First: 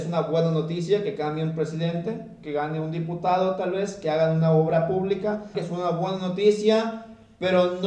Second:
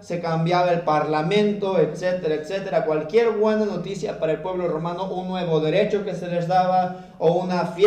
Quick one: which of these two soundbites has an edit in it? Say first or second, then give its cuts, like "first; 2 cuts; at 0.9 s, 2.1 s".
first; 1 cut; at 5.5 s